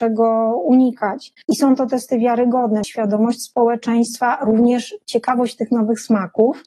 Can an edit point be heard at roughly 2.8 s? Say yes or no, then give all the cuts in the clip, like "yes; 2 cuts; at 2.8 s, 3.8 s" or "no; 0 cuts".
yes; 2 cuts; at 1.4 s, 2.8 s